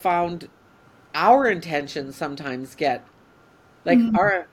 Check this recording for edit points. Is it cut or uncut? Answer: uncut